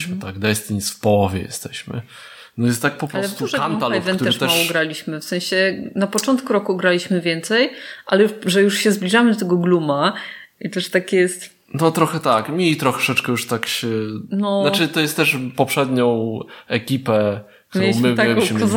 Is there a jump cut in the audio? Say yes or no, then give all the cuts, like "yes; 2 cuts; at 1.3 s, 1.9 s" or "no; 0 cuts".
no; 0 cuts